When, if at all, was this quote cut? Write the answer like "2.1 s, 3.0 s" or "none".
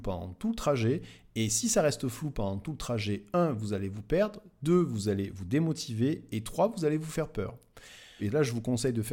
8.2 s